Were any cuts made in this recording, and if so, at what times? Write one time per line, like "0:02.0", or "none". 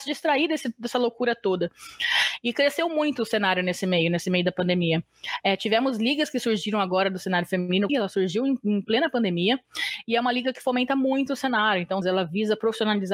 0:07.9
0:12.0